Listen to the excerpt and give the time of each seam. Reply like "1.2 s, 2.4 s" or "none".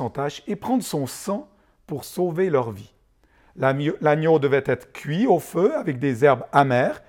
none